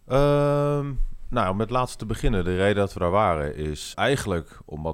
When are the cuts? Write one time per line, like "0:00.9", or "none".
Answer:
0:03.9